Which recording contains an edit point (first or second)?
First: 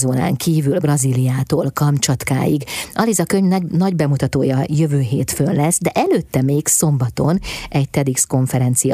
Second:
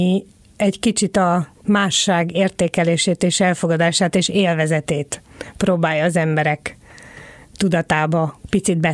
second